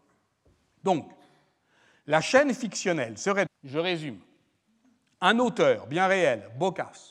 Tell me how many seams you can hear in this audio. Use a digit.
1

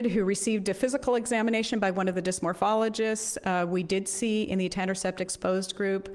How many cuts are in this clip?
0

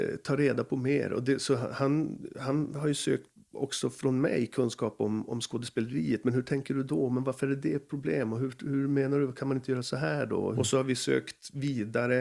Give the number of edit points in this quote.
1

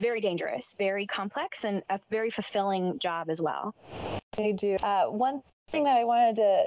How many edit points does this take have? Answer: 1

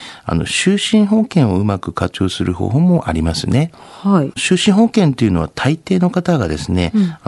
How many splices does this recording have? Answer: 1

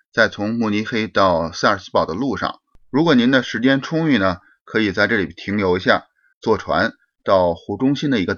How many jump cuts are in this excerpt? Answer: 1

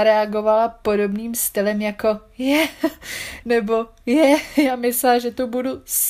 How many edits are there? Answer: 1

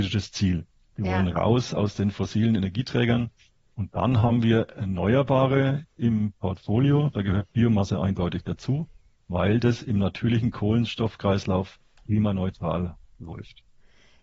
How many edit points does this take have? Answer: 0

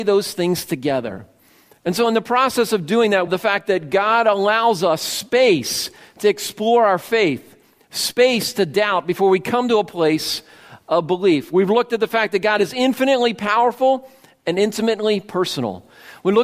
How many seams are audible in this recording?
1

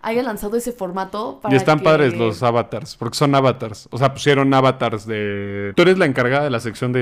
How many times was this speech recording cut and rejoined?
1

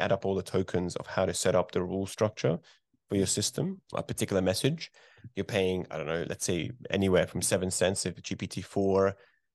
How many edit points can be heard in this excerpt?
1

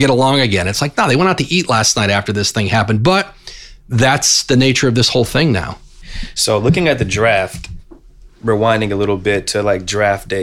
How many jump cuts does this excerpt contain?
0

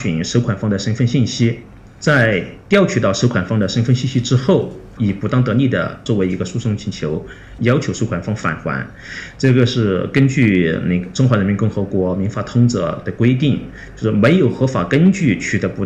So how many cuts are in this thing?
2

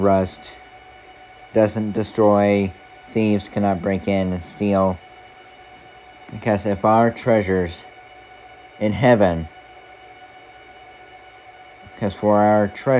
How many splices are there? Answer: 0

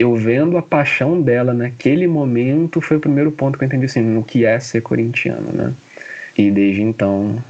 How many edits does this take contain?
0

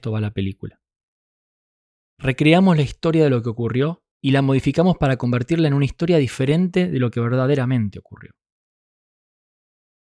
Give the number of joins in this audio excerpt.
1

